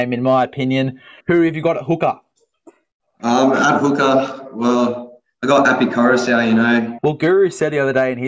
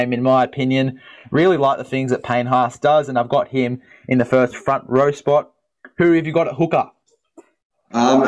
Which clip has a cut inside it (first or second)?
first